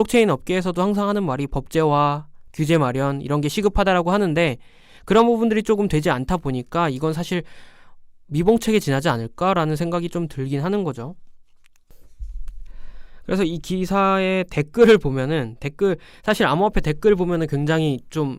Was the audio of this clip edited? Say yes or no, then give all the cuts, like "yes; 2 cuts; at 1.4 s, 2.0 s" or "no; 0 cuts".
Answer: no; 0 cuts